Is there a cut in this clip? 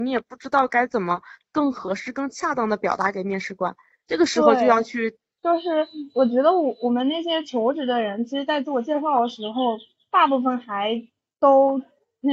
yes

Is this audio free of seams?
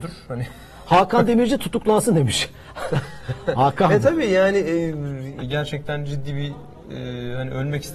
no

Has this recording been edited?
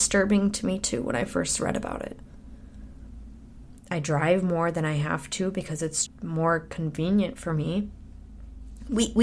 yes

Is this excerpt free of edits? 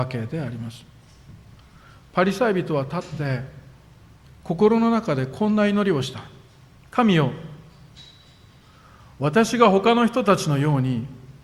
yes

